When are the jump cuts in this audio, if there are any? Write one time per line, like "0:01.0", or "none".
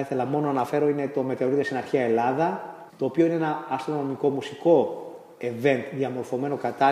0:02.9

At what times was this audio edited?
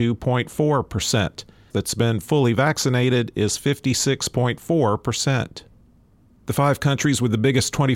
0:01.7

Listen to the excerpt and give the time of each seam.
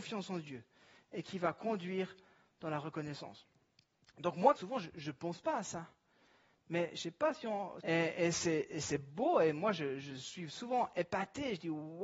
0:04.6
0:07.8

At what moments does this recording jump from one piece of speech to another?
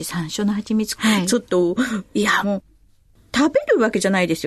0:01.0
0:02.4

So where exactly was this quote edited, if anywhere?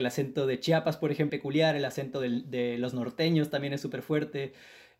0:01.3

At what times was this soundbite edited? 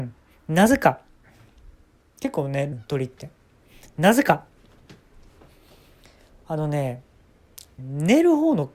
0:02.7
0:07.8

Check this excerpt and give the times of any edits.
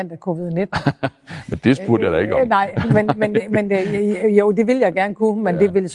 none

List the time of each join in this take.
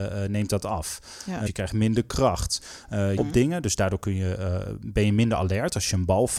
0:01.5
0:03.2

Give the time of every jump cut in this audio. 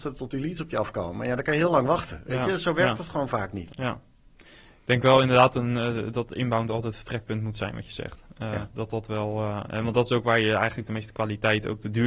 0:03.7

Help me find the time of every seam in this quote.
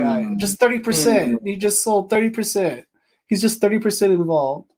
none

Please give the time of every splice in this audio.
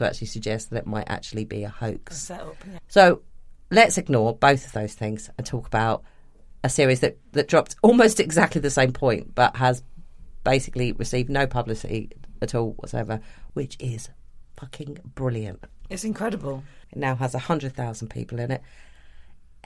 0:13.5
0:16.8

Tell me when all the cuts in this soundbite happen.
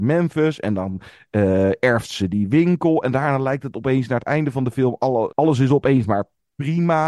0:05.3

